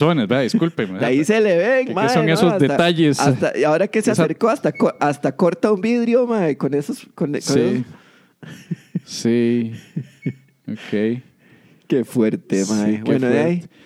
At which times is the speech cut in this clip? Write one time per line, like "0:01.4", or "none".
none